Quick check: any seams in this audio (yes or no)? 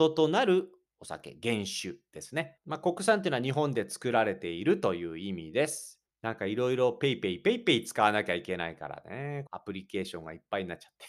yes